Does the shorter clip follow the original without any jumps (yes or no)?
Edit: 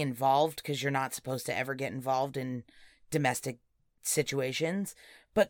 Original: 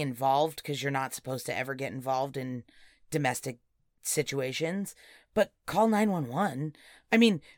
yes